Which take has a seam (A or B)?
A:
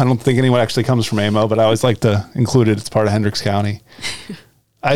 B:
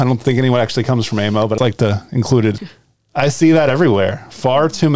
B